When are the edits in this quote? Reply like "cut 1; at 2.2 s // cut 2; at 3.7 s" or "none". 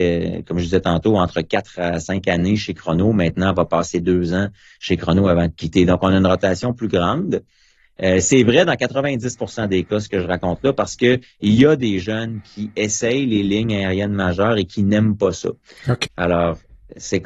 cut 1; at 16.1 s